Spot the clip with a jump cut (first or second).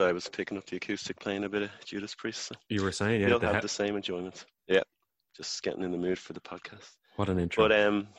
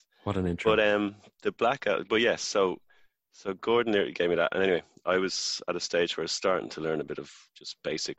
first